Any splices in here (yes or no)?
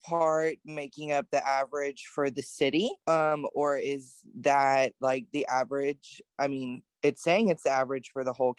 yes